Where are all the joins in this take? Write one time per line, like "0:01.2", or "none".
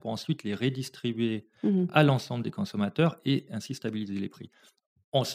none